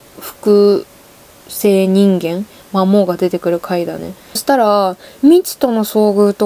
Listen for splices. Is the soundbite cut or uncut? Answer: cut